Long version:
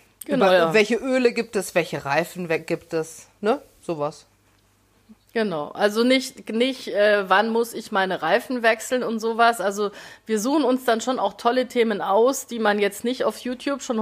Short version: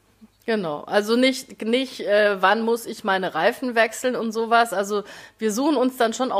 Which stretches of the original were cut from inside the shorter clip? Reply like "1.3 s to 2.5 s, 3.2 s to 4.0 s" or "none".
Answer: none

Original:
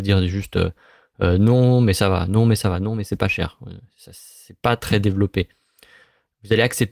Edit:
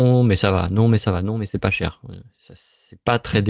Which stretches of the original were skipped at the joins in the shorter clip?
none

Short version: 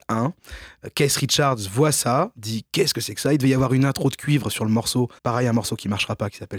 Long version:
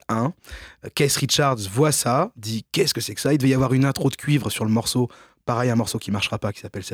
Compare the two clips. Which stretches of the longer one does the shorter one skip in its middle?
5.2 s to 5.4 s

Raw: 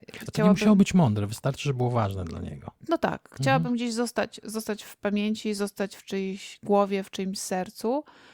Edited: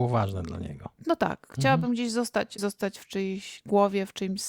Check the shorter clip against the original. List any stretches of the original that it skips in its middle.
4.4 s to 5.6 s

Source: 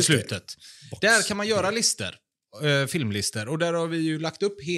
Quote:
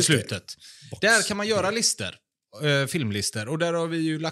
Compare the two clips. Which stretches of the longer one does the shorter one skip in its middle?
none

